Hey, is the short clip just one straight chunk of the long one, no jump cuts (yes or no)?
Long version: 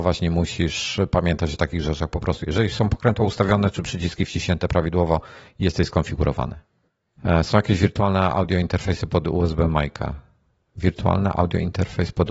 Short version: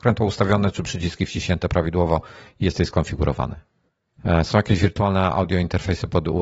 yes